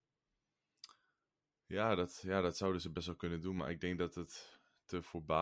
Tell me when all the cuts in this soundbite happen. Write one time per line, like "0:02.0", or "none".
none

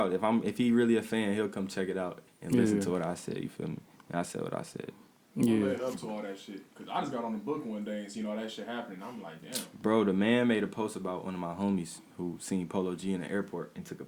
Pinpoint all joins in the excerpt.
0:02.3

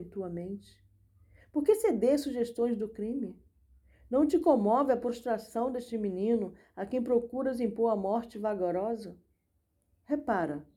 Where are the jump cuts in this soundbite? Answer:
none

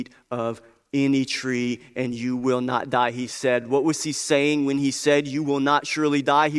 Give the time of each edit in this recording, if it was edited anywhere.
none

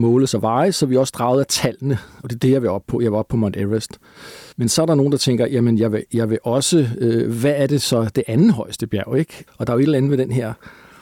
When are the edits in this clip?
0:02.2
0:04.5
0:09.5

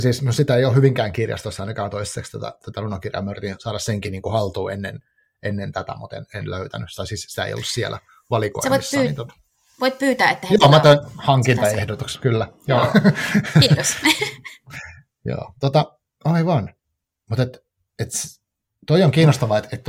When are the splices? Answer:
none

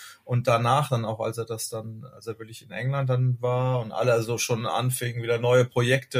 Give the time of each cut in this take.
none

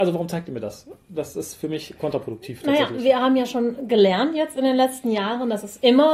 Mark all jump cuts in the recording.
none

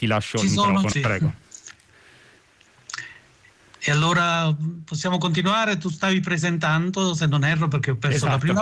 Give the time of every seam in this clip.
0:00.9

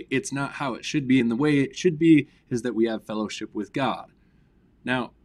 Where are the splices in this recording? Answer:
none

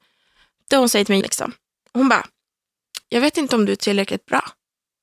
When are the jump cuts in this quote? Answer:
0:01.2
0:03.0

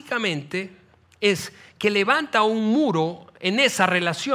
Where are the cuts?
none

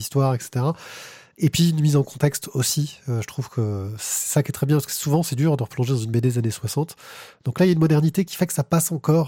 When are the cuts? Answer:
none

